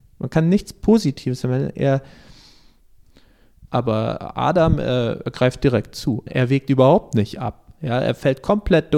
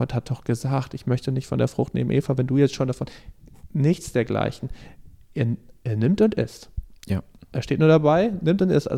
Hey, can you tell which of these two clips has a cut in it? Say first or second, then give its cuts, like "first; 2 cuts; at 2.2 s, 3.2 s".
first; 2 cuts; at 3.7 s, 6.3 s